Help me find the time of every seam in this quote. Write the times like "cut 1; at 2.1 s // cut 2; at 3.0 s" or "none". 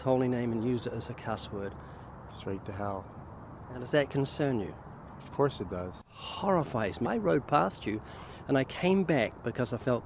cut 1; at 2.3 s // cut 2; at 7.0 s